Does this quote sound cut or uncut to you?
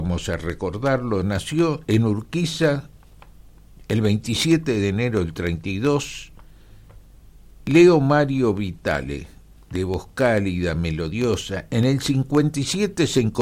uncut